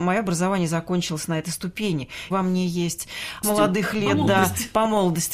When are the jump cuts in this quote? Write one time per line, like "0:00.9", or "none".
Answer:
0:02.3
0:03.4